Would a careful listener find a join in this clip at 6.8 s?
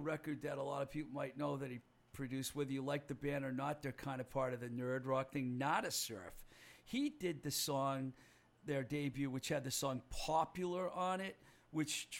no; 0 cuts

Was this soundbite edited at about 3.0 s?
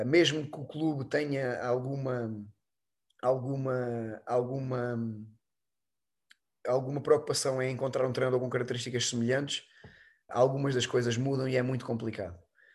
no; 1 cut; at 10.3 s

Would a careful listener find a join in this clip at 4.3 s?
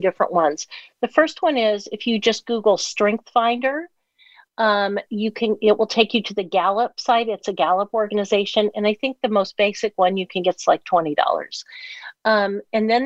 no; 0 cuts

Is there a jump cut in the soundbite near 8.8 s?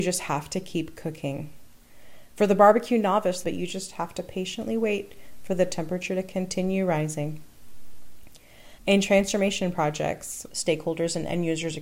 no; 2 cuts; at 3.4 s, 10.5 s

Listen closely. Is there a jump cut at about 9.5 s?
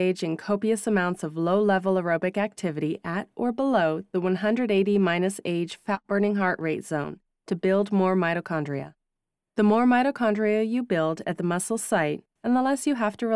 no; 1 cut; at 12.4 s

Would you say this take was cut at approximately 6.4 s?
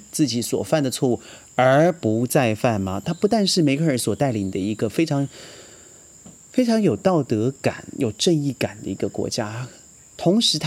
no; 1 cut; at 3.0 s

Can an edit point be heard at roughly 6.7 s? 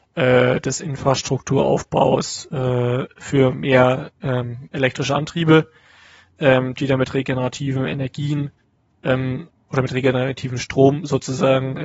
no; 0 cuts

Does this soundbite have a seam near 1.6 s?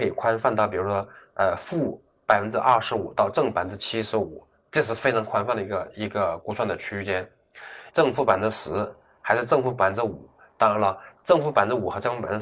no; 1 cut; at 7.9 s

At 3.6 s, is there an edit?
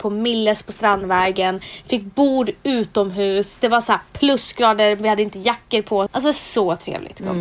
no; 1 cut; at 6.1 s

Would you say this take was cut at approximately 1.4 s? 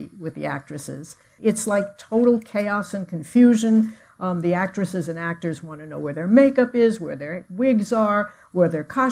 yes; 1 cut; at 1.4 s

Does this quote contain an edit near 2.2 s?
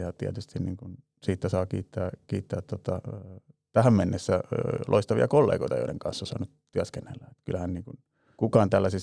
no; 0 cuts

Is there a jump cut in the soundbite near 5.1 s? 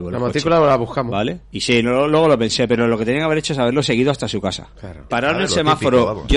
yes; 2 cuts; at 1.4 s, 5.1 s

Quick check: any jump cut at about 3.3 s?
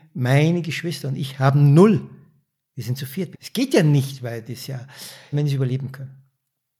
yes; 2 cuts; at 3.3 s, 5.3 s

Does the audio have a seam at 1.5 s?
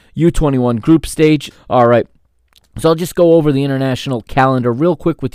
yes; 1 cut; at 1.5 s

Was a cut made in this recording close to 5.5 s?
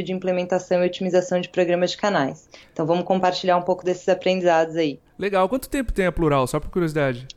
no; 0 cuts

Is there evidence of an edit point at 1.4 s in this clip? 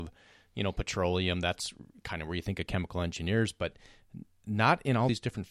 no; 0 cuts

